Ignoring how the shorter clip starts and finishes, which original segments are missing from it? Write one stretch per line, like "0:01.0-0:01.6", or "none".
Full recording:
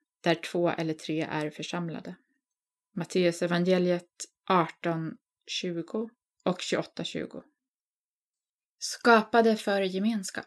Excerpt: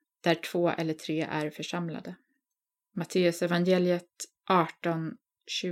none